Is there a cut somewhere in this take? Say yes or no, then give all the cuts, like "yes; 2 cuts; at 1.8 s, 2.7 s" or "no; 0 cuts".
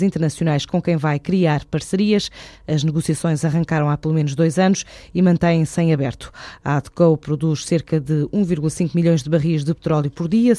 no; 0 cuts